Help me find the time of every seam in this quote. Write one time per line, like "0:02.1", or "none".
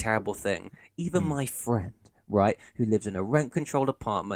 none